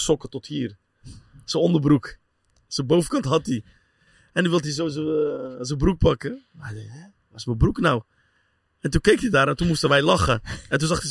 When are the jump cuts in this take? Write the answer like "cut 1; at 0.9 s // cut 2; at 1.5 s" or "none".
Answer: none